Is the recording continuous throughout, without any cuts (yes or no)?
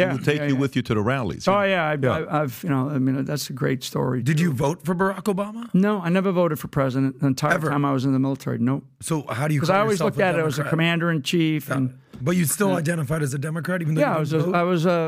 yes